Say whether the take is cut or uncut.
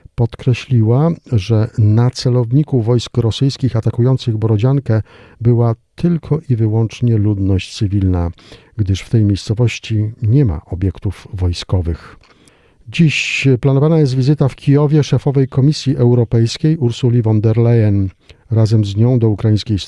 uncut